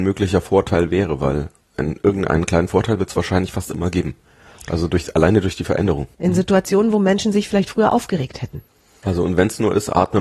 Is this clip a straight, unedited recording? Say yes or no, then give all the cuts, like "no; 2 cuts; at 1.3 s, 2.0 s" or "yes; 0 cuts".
no; 2 cuts; at 6.1 s, 9.0 s